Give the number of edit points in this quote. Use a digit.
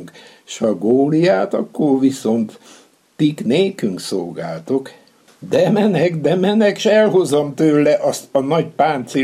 1